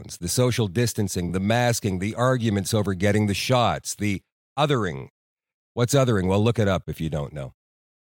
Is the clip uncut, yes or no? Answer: yes